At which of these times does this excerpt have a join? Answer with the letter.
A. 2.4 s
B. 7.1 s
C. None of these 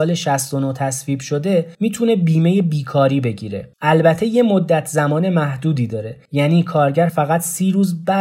C